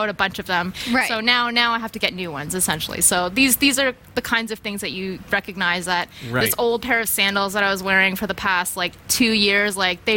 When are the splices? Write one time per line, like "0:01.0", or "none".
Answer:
none